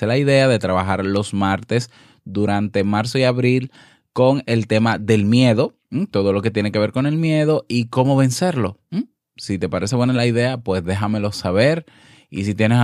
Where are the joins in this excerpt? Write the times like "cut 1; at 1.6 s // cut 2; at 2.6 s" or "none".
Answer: none